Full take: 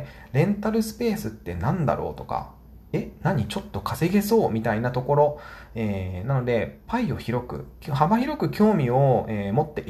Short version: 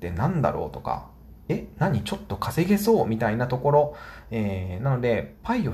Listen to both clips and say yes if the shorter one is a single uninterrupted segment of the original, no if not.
yes